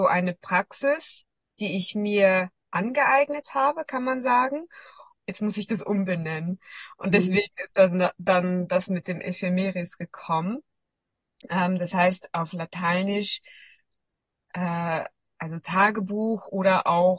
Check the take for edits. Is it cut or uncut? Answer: cut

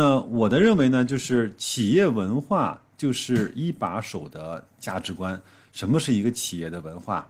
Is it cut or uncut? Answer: uncut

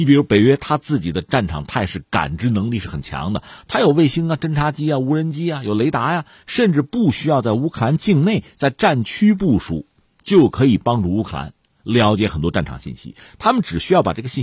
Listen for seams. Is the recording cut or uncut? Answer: uncut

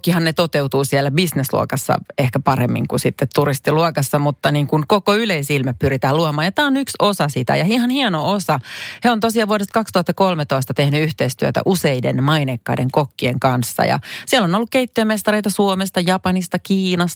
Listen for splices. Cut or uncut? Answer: uncut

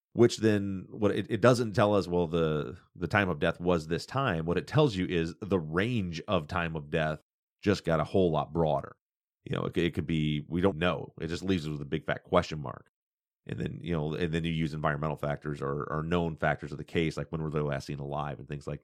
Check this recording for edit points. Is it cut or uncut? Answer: cut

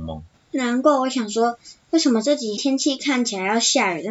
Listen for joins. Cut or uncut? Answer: cut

